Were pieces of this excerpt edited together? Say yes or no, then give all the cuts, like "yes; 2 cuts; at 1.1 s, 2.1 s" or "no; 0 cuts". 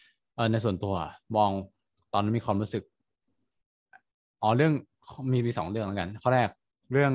no; 0 cuts